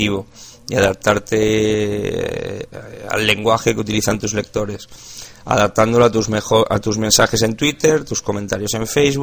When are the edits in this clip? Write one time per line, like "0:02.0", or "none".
none